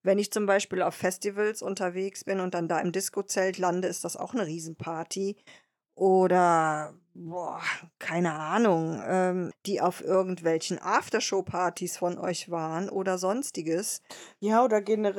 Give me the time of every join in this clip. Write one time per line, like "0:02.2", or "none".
0:09.5